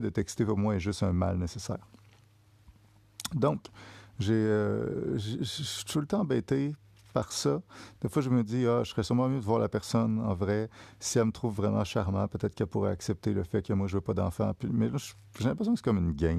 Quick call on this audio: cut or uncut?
uncut